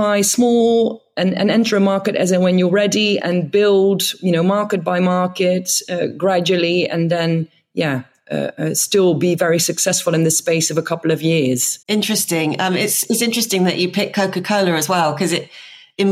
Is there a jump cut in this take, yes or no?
yes